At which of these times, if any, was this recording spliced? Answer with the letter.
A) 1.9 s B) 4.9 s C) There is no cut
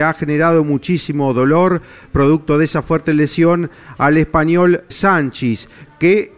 B